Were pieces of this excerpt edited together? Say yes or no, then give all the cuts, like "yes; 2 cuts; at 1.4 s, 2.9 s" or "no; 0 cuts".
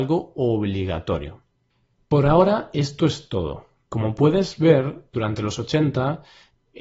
yes; 1 cut; at 5.1 s